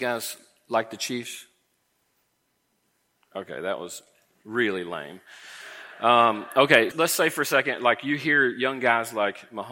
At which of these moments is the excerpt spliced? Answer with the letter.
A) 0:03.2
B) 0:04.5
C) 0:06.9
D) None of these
C